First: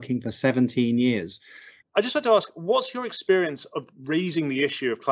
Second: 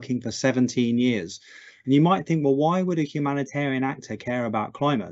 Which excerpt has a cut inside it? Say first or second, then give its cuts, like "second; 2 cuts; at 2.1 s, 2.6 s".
first; 1 cut; at 1.8 s